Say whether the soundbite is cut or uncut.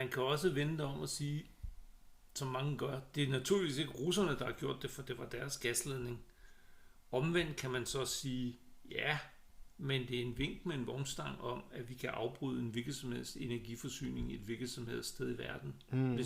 uncut